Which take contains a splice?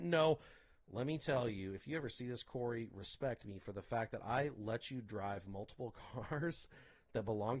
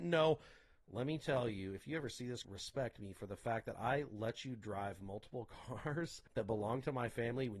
second; 2 cuts; at 2.4 s, 6.3 s

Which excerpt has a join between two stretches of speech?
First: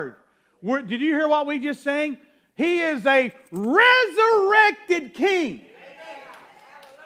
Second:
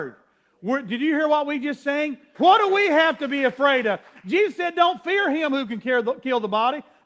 second; 1 cut; at 2.3 s

